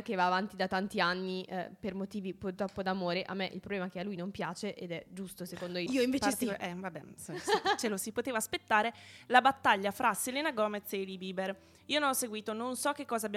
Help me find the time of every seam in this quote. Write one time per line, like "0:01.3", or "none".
0:05.9